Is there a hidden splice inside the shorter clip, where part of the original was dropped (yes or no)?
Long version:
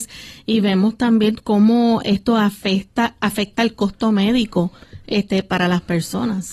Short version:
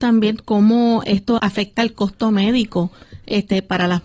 yes